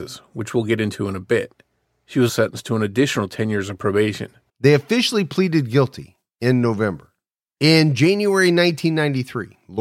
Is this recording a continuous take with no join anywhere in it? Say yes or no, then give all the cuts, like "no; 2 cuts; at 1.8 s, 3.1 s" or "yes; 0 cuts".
no; 2 cuts; at 2.3 s, 4.5 s